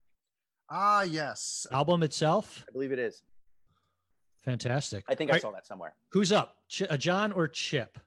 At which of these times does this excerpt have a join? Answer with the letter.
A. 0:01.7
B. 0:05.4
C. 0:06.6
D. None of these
A